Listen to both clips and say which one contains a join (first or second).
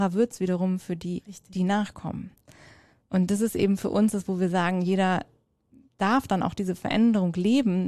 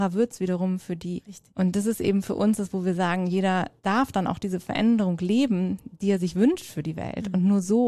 second